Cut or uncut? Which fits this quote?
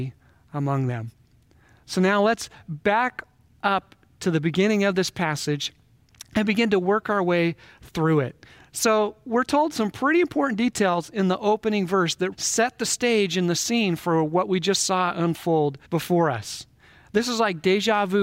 cut